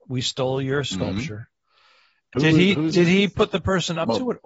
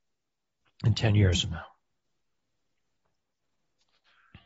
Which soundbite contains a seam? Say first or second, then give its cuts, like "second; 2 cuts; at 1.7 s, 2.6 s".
first; 1 cut; at 2.3 s